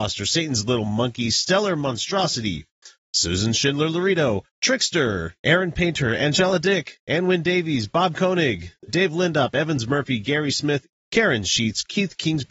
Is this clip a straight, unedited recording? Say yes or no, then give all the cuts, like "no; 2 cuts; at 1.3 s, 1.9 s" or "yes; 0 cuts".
no; 3 cuts; at 4.5 s, 8.9 s, 10.9 s